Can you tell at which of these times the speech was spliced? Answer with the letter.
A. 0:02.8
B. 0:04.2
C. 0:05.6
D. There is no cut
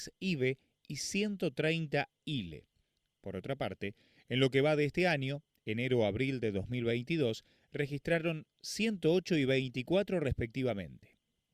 D